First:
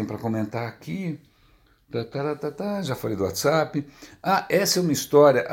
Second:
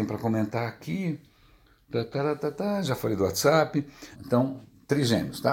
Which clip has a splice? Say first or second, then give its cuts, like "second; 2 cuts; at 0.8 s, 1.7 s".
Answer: second; 1 cut; at 4.2 s